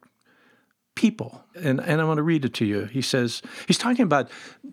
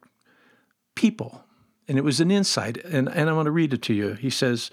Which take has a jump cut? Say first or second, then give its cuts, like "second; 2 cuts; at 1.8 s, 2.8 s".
first; 1 cut; at 1.5 s